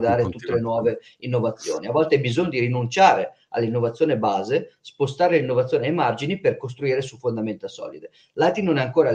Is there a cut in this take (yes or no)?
no